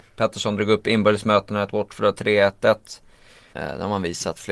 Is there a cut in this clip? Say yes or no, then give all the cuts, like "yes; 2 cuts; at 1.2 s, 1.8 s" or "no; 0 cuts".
yes; 1 cut; at 3.5 s